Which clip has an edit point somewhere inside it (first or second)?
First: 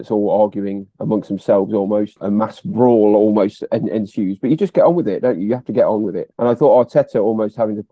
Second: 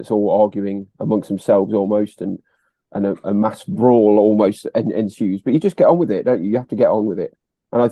first